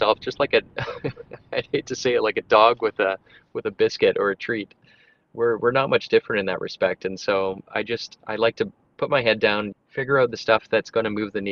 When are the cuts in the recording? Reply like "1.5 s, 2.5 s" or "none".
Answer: 9.7 s

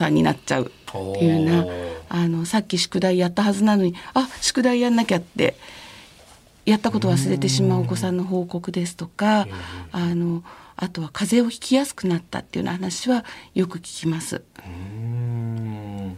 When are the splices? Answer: none

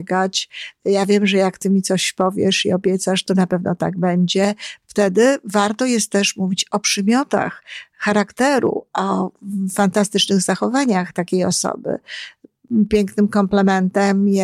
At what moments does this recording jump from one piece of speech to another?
4.8 s

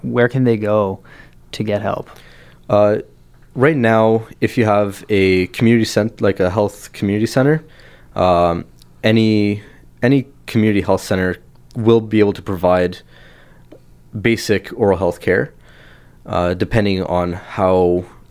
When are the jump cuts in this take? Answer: none

